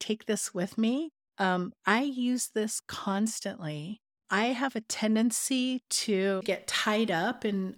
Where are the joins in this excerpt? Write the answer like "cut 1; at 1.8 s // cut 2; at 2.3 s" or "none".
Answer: cut 1; at 1.3 s // cut 2; at 4.2 s